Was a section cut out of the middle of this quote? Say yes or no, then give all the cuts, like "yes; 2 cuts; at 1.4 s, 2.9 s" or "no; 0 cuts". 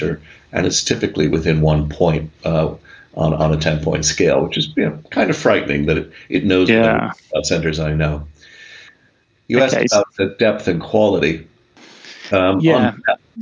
no; 0 cuts